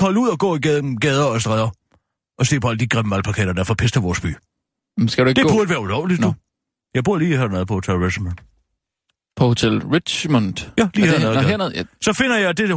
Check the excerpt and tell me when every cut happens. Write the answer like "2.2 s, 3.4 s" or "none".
none